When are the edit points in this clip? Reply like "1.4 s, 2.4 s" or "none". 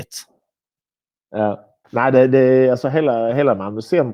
1.8 s